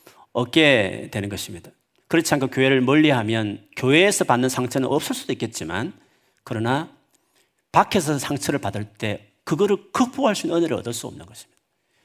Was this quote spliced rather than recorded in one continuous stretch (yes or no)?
no